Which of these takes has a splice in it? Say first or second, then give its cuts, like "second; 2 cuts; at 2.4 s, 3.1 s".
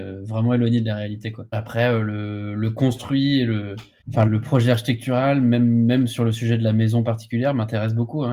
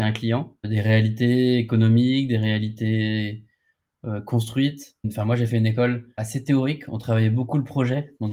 first; 1 cut; at 4.3 s